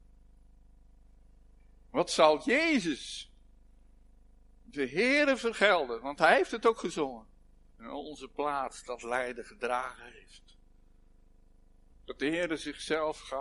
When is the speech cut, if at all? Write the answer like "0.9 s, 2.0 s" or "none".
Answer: 7.7 s, 11.9 s